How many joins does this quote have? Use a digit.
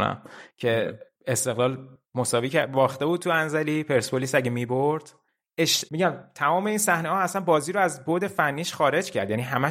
1